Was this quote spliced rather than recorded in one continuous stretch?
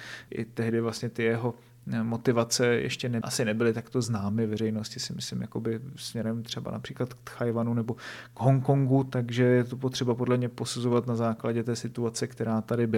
no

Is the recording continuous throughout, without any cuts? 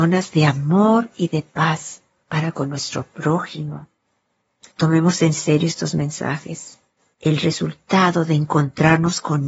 no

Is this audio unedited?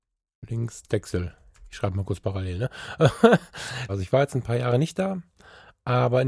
no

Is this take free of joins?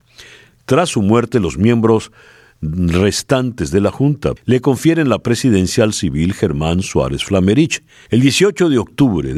no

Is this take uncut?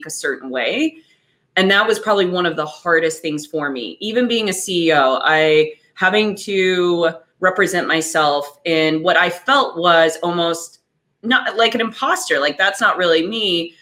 yes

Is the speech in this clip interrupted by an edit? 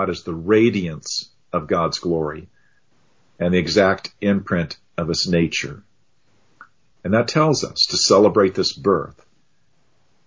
yes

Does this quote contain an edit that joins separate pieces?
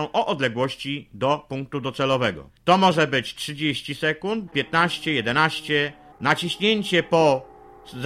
yes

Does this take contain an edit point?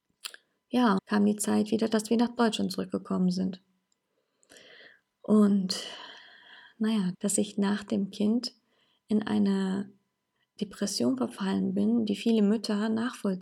yes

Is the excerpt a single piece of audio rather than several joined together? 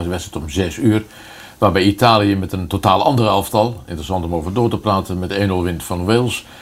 yes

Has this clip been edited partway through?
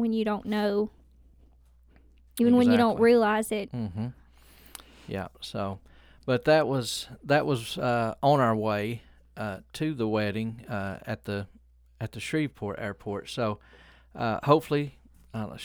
yes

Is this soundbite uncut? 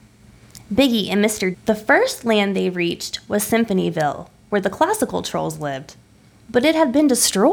no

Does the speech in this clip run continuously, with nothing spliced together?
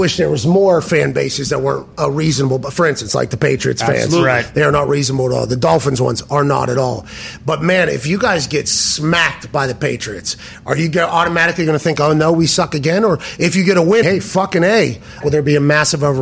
no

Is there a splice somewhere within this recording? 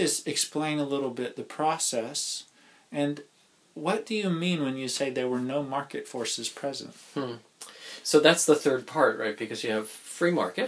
no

